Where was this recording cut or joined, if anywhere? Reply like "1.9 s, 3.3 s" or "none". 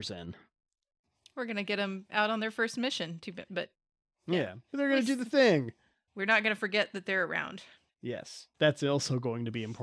3.5 s, 4.7 s

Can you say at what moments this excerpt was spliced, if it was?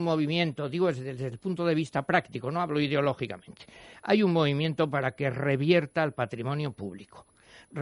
none

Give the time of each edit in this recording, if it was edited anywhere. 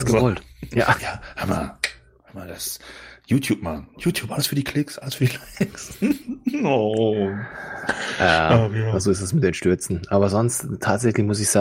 none

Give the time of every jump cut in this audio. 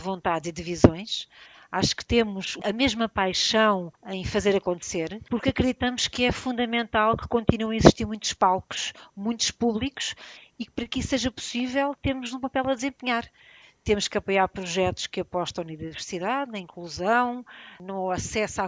none

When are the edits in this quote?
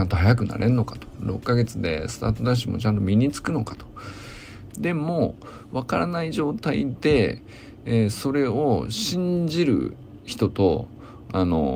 4.7 s

